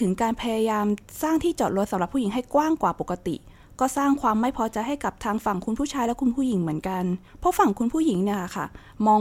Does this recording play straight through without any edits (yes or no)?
no